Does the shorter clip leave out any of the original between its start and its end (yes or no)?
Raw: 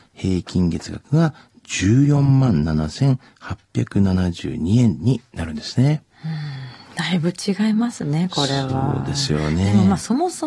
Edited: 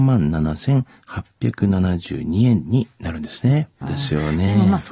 yes